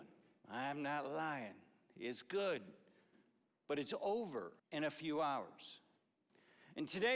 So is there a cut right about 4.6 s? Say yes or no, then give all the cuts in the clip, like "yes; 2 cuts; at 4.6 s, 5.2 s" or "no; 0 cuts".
yes; 1 cut; at 4.6 s